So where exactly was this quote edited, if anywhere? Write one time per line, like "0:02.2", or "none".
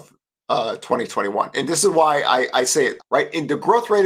0:03.0